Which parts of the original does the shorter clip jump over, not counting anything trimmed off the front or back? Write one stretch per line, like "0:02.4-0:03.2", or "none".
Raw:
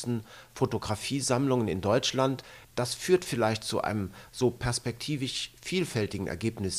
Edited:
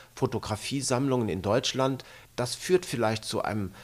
none

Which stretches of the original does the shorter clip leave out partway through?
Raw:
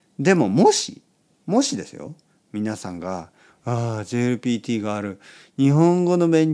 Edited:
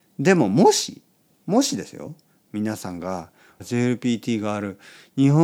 0:03.6-0:04.0

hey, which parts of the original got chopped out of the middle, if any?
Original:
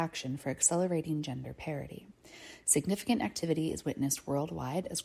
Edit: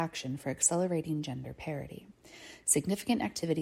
none

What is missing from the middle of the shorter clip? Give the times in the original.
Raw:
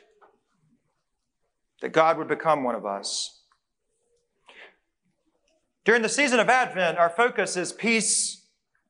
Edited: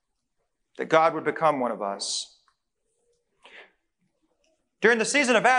none

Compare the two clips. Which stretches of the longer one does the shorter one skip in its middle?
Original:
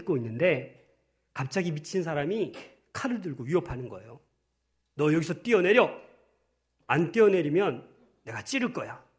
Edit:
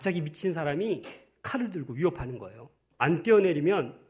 0:04.4-0:06.8

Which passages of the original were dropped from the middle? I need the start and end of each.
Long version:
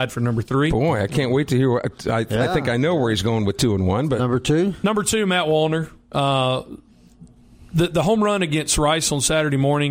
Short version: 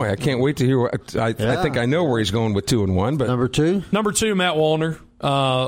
none

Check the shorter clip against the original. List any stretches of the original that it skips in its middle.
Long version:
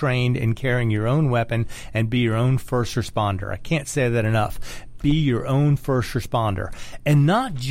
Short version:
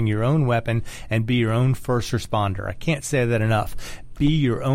none

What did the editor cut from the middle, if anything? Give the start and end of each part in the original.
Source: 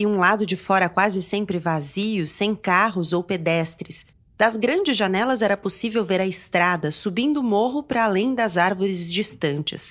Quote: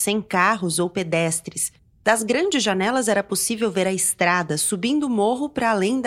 none

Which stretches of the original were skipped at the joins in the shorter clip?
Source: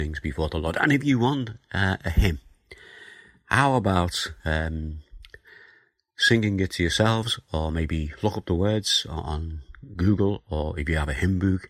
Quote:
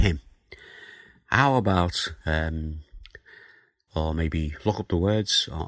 0:06.1-0:07.4

